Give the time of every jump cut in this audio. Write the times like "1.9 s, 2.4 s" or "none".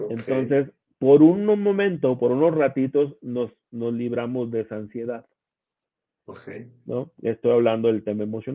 none